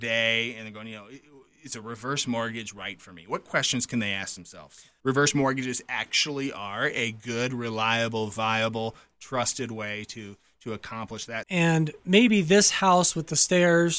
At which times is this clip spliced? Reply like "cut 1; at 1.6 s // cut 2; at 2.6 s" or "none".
cut 1; at 5.0 s // cut 2; at 11.4 s